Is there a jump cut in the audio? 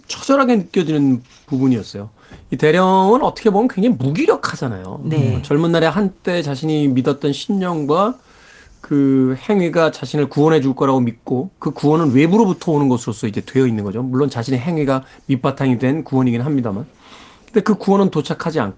no; 0 cuts

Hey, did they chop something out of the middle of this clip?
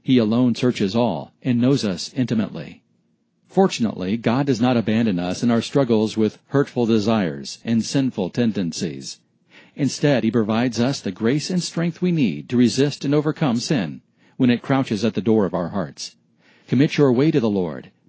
yes; 1 cut; at 16.6 s

